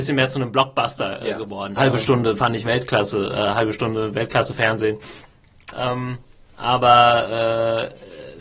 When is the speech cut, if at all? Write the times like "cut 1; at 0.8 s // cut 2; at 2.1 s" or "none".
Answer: cut 1; at 1.8 s // cut 2; at 5.7 s